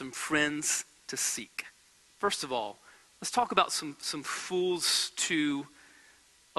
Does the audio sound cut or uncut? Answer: uncut